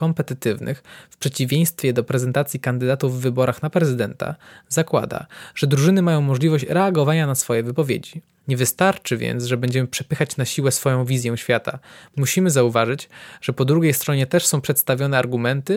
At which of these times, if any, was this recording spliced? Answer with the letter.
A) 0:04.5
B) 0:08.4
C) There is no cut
B